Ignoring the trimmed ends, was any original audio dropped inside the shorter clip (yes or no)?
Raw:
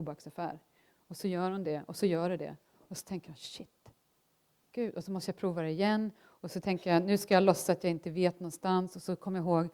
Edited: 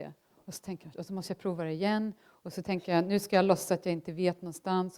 yes